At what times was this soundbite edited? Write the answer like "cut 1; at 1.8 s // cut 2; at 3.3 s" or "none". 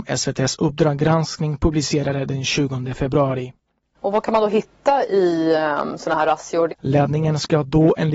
cut 1; at 3.9 s // cut 2; at 6.7 s